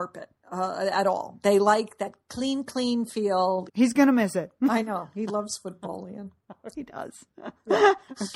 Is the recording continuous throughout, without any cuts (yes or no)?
no